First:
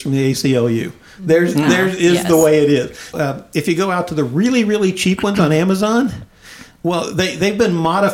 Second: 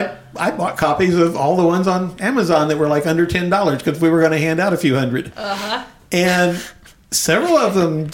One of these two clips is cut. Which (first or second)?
first